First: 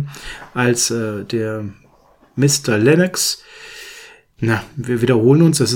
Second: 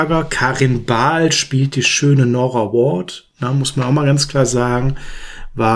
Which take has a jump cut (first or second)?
first